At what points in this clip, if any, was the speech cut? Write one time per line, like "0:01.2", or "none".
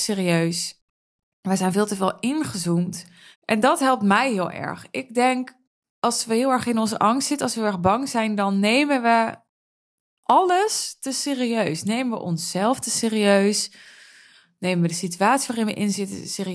0:03.3